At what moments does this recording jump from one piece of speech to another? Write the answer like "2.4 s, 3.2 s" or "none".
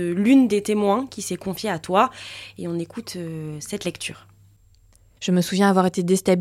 5.2 s